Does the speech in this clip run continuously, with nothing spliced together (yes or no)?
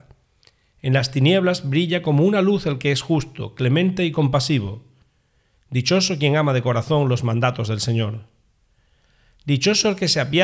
yes